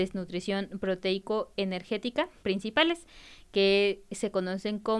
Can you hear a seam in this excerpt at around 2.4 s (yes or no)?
yes